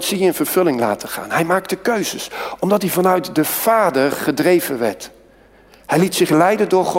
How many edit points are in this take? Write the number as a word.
zero